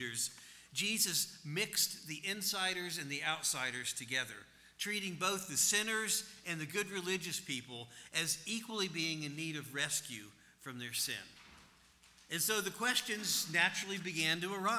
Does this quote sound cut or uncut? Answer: uncut